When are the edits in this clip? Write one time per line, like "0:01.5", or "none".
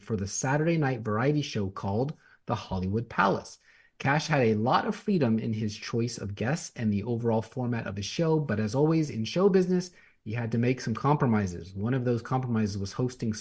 none